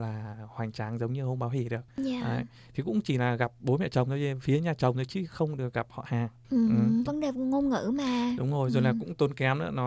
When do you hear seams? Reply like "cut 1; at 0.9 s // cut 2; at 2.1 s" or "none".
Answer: cut 1; at 7.1 s